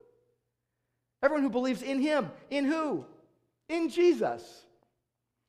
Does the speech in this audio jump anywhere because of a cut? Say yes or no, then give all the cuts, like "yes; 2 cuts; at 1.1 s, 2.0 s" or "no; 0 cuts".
no; 0 cuts